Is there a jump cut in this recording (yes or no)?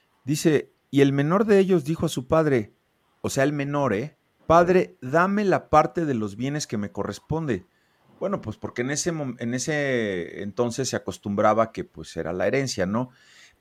yes